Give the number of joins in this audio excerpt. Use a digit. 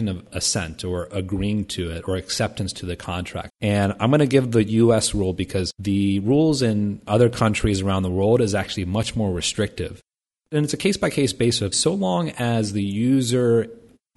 2